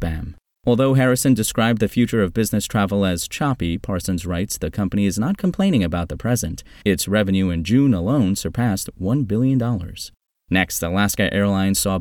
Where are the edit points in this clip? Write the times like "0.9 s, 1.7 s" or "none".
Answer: 6.8 s, 10.4 s